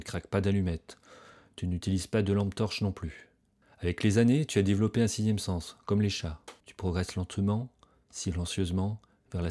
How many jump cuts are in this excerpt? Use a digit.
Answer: 2